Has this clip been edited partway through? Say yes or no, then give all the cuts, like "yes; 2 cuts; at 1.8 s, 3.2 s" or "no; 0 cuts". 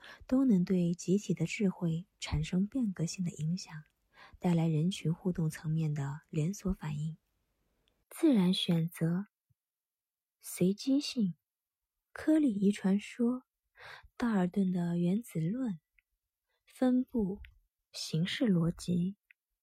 yes; 1 cut; at 8.0 s